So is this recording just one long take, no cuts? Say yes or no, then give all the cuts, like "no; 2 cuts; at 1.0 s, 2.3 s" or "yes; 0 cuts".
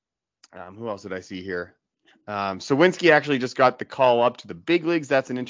yes; 0 cuts